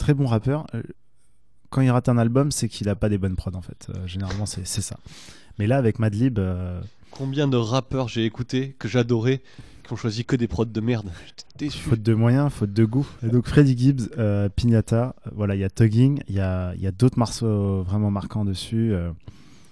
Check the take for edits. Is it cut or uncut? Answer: cut